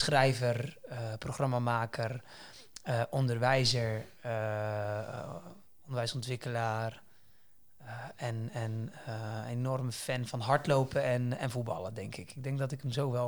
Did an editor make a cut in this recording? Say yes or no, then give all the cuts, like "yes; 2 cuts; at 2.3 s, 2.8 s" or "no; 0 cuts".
no; 0 cuts